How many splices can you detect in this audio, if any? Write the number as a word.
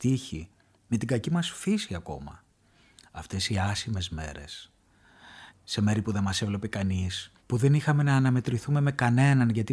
two